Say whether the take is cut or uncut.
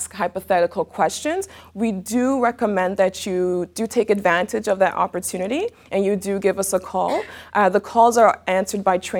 uncut